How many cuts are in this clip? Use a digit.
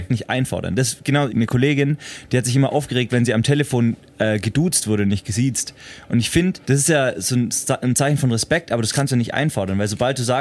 2